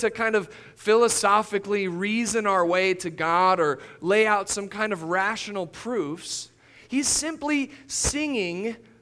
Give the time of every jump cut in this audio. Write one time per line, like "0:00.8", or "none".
none